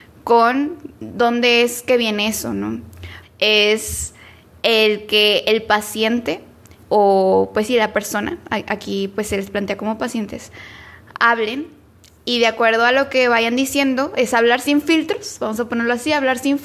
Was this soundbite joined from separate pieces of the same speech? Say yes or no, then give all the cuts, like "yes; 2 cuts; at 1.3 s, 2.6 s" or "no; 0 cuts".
yes; 1 cut; at 3.2 s